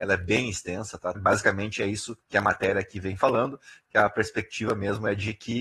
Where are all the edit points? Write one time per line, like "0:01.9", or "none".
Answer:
0:01.1
0:02.2